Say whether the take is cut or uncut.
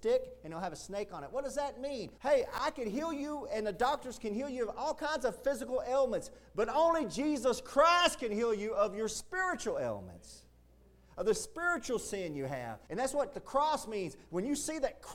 cut